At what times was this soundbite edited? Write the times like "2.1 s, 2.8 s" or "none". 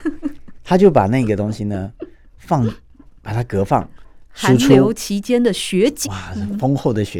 4.2 s, 6.0 s